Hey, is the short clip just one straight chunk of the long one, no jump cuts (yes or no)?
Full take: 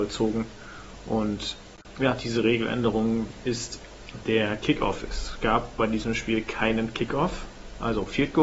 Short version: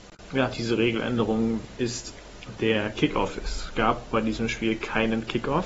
yes